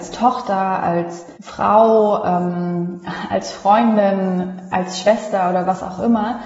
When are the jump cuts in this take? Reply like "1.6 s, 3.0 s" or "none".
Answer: 1.3 s